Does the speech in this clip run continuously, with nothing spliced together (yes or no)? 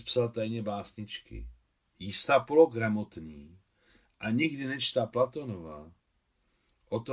no